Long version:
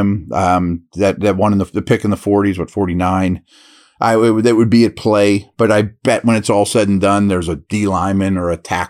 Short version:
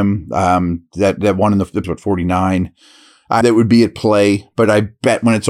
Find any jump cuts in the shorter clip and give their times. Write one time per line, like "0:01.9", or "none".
0:01.8
0:03.4